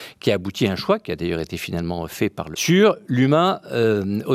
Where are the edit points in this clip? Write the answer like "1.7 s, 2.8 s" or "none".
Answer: 2.5 s